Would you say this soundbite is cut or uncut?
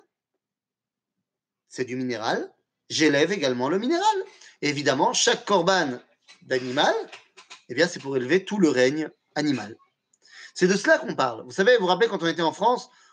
uncut